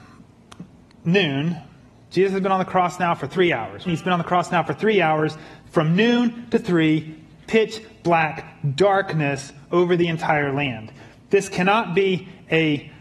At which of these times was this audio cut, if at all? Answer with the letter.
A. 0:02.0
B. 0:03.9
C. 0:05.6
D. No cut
B